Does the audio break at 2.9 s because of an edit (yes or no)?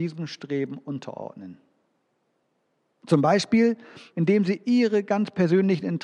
yes